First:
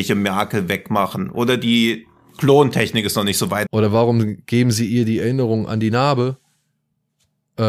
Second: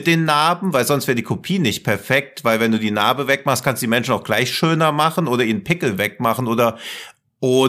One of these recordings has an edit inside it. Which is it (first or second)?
first